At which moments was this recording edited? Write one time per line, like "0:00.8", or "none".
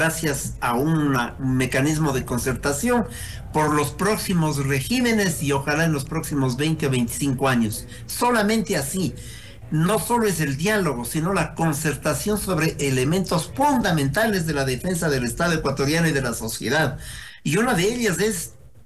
none